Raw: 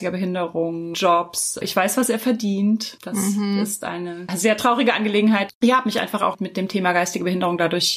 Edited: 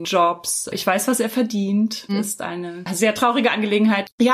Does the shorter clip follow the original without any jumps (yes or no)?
no